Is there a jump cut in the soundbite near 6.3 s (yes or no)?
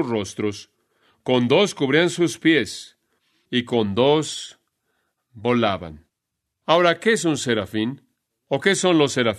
no